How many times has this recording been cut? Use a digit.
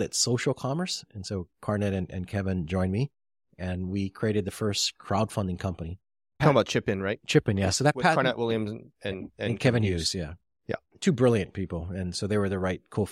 0